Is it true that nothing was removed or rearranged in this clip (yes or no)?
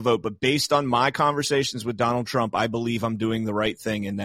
yes